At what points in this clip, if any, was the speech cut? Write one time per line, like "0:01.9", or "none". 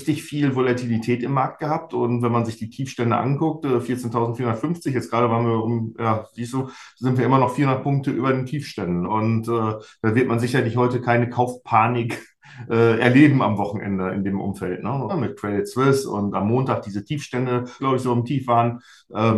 0:09.0
0:15.1
0:17.8